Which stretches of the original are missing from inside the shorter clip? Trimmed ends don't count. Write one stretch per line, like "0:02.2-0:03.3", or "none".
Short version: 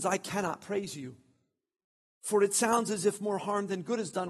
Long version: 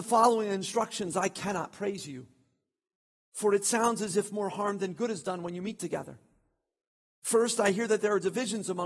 none